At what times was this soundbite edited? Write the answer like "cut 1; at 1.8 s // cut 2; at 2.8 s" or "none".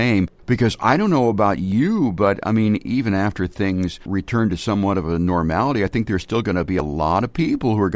cut 1; at 2.8 s